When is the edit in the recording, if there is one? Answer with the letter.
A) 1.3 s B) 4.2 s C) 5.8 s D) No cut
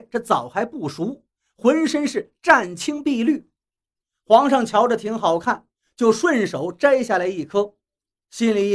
D